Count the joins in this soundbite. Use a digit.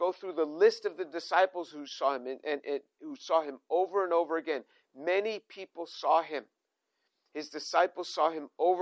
1